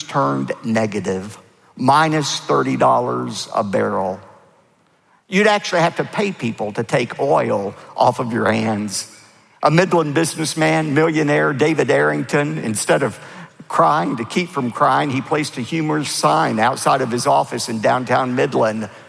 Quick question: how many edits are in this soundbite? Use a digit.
0